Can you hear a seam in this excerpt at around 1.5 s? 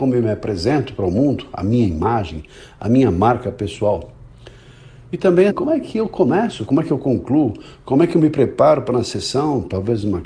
no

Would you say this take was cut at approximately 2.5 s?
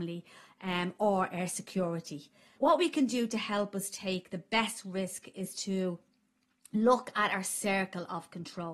yes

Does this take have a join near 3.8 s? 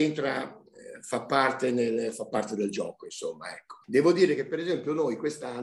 yes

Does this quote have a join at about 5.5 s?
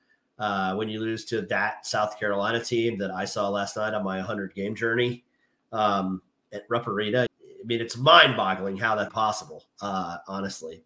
no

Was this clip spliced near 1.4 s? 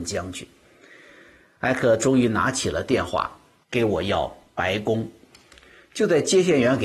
no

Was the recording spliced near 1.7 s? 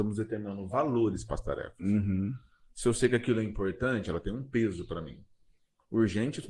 no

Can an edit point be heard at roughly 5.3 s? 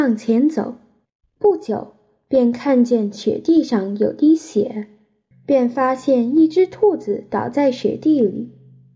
yes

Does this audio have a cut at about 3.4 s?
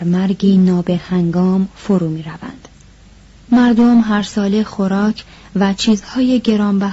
yes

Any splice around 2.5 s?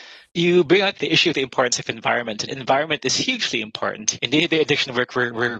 yes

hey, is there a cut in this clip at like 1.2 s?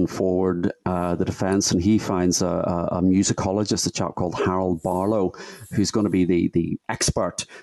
no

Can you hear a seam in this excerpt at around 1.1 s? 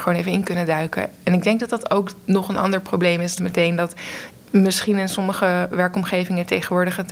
no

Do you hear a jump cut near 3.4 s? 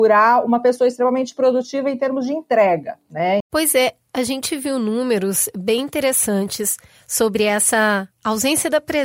yes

